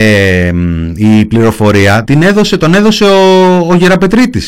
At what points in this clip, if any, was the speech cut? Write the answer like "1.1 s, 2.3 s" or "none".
2.0 s